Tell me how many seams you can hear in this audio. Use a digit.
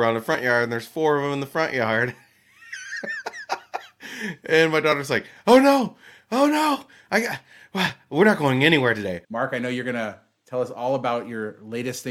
1